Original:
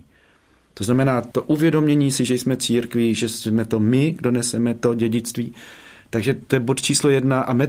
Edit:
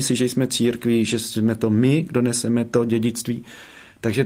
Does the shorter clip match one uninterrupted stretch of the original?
yes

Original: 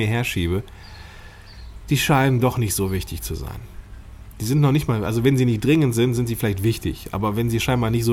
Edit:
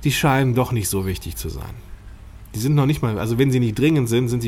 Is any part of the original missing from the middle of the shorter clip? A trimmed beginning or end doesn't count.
no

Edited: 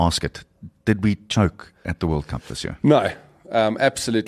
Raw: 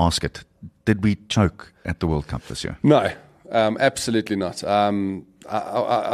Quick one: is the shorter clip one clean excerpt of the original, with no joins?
yes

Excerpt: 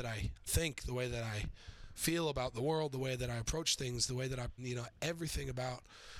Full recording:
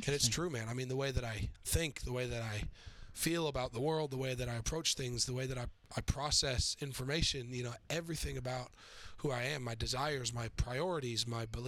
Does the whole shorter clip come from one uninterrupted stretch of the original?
no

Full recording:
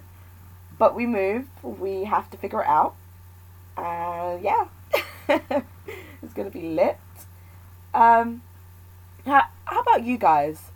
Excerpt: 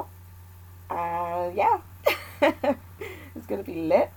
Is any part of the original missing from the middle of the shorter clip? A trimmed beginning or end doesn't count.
no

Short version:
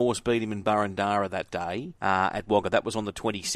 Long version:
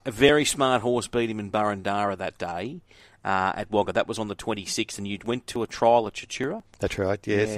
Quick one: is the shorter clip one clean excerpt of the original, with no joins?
no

